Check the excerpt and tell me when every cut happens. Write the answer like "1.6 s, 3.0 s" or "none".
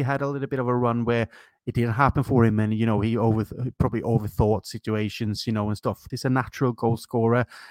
6.1 s